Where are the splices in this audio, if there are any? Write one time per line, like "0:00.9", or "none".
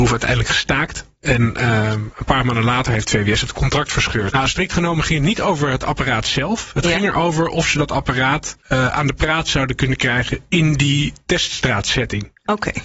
0:04.3
0:08.6